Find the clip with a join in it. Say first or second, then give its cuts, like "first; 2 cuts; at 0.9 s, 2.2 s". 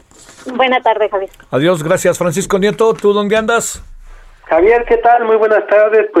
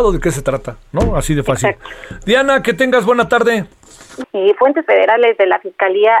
second; 1 cut; at 4.2 s